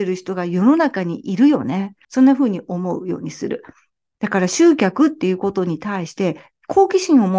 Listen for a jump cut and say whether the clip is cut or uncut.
cut